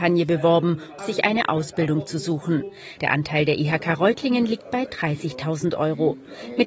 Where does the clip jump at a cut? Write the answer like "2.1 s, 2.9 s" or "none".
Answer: 1.0 s, 3.0 s